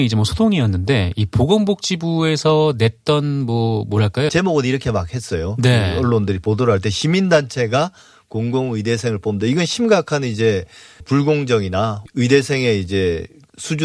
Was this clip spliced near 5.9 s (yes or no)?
no